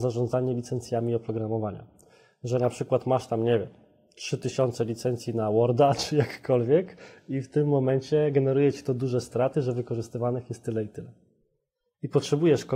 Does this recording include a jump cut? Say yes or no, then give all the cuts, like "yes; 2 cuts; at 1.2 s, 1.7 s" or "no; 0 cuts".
no; 0 cuts